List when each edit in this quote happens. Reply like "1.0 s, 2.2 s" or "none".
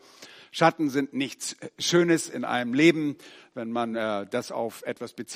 none